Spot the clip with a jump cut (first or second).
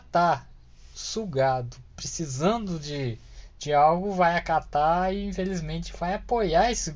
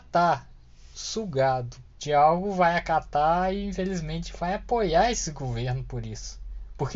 second